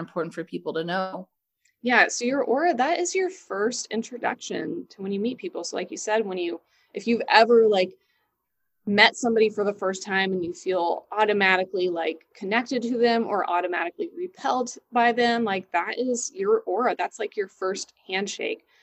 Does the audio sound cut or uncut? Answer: uncut